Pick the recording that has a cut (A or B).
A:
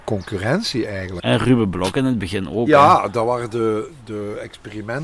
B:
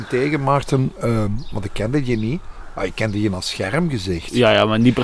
A